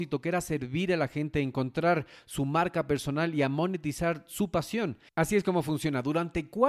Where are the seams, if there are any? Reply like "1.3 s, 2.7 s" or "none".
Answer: 5.1 s